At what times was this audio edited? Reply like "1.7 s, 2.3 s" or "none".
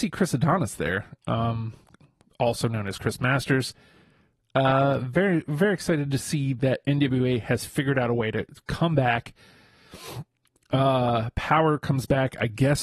none

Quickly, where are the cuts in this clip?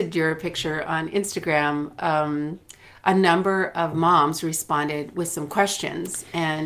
none

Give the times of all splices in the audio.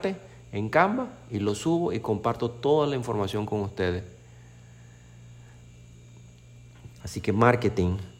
7.0 s

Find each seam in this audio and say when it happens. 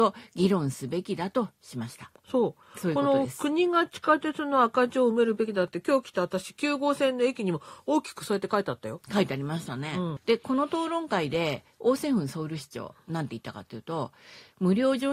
2.1 s, 10.2 s

